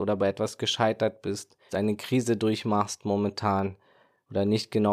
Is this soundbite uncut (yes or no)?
no